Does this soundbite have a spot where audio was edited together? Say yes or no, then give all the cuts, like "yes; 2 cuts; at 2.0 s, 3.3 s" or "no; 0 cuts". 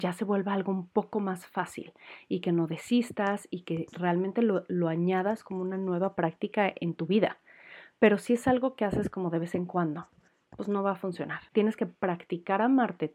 yes; 1 cut; at 11.5 s